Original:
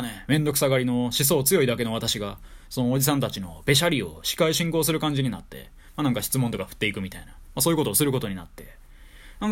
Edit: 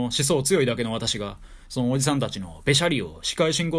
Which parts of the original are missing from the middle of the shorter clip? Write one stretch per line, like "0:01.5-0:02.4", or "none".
none